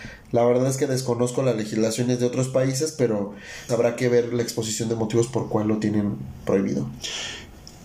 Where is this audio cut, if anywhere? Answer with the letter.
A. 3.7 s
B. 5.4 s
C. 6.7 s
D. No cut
A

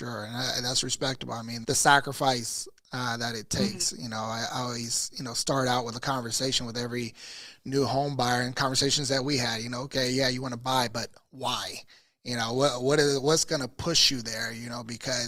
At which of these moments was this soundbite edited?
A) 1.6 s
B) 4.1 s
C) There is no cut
A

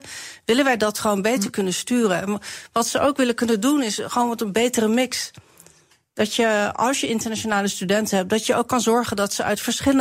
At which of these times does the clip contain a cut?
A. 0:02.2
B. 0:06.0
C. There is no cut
C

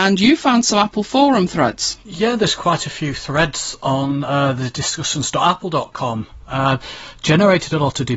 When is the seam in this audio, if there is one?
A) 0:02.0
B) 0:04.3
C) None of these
A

